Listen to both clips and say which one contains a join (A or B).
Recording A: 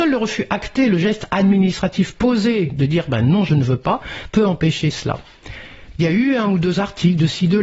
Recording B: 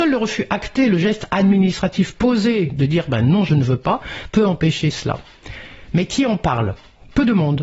A